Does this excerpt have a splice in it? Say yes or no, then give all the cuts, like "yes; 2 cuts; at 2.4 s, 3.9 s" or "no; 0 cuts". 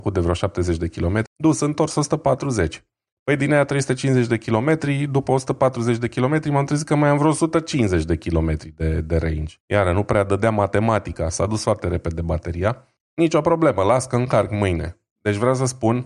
yes; 3 cuts; at 1.3 s, 9.6 s, 13.0 s